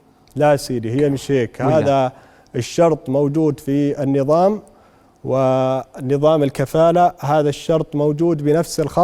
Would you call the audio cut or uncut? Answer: uncut